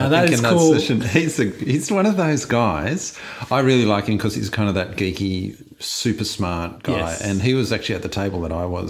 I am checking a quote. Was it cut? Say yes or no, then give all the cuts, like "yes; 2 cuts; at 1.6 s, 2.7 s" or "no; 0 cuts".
no; 0 cuts